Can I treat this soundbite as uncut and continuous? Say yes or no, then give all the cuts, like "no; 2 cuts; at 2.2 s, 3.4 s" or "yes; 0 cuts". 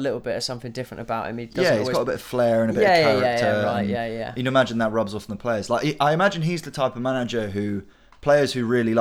yes; 0 cuts